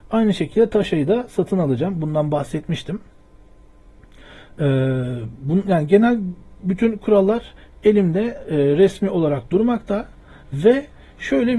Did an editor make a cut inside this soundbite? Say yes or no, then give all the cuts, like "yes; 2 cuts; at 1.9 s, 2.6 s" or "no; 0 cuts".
no; 0 cuts